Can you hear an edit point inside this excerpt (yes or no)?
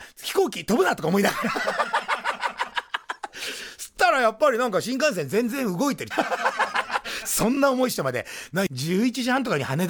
yes